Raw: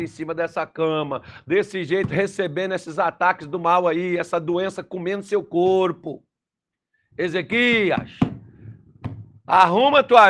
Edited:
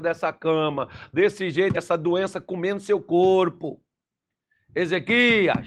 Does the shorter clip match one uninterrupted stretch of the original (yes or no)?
no